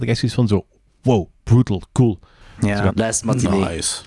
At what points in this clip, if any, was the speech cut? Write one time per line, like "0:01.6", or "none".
0:02.9